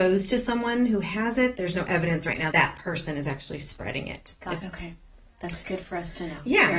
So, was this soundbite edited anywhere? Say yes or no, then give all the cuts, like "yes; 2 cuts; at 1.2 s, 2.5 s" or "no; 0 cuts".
yes; 2 cuts; at 2.5 s, 4.6 s